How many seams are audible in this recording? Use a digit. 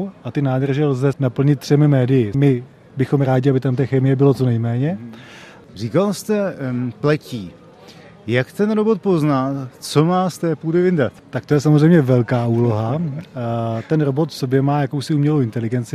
1